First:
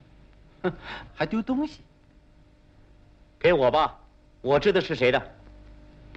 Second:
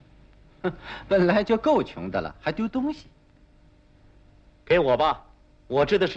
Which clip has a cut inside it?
first; 1 cut; at 1.1 s

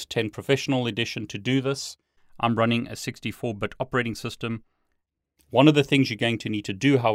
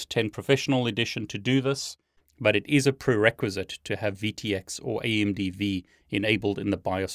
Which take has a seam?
second; 1 cut; at 2.2 s

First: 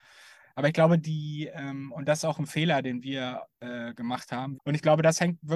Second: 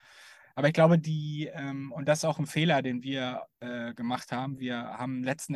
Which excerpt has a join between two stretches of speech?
first; 1 cut; at 4.6 s

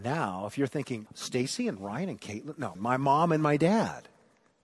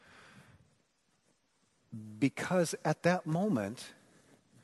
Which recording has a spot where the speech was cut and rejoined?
first; 2 cuts; at 1.1 s, 2.7 s

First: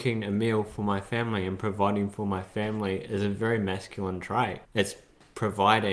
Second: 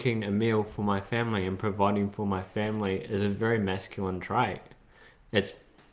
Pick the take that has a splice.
first; 1 cut; at 4.6 s

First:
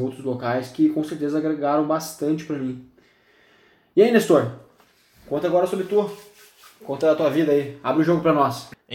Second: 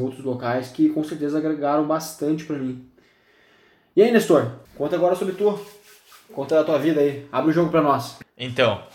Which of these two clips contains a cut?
second; 1 cut; at 4.6 s

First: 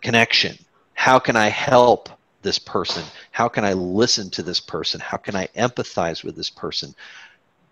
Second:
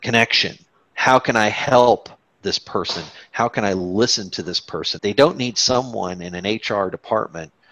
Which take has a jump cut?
second; 1 cut; at 5.0 s

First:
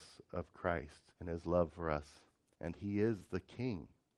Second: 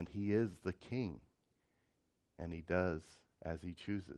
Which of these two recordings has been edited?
first; 2 cuts; at 1.1 s, 2.5 s

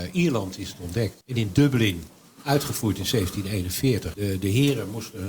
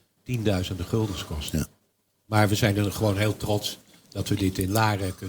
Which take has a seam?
first; 2 cuts; at 1.2 s, 4.1 s

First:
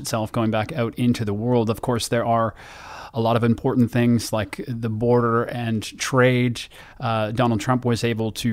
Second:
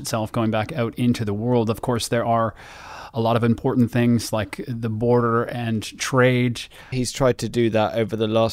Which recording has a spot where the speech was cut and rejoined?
second; 1 cut; at 6.9 s

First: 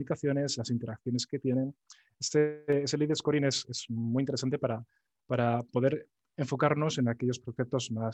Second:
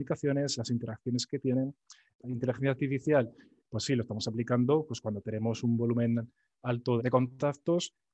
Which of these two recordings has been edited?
second; 2 cuts; at 2.1 s, 7.0 s

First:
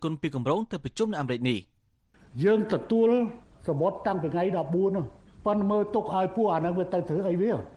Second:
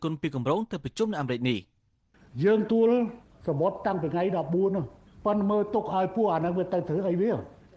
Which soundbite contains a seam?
second; 1 cut; at 2.7 s

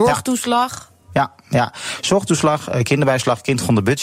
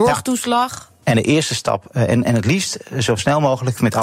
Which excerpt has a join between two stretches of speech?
second; 1 cut; at 1.0 s

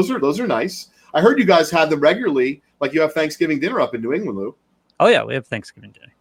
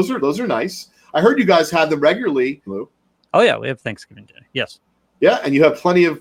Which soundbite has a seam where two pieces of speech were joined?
second; 1 cut; at 2.7 s

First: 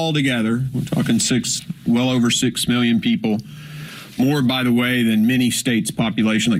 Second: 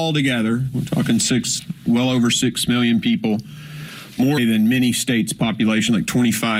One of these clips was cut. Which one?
second; 1 cut; at 4.4 s

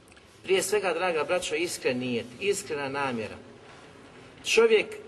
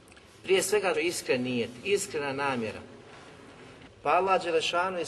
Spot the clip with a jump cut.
second; 2 cuts; at 0.9 s, 3.9 s

